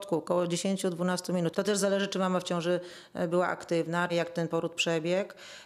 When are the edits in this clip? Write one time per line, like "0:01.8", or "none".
0:01.5
0:04.1